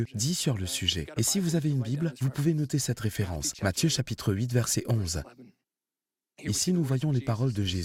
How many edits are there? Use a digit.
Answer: 0